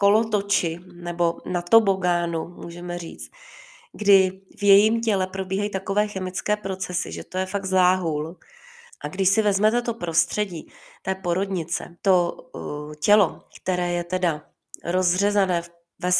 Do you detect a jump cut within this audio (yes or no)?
yes